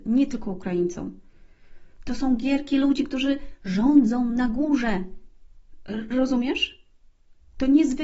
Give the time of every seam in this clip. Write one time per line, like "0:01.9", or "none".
0:02.0